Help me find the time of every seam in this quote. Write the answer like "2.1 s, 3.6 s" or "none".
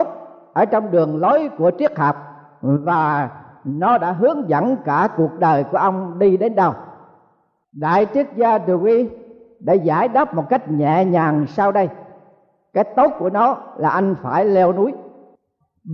none